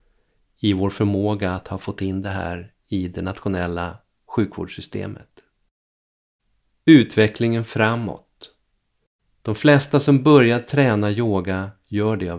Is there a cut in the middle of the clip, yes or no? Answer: no